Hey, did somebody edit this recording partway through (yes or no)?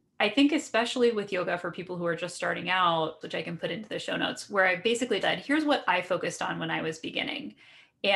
yes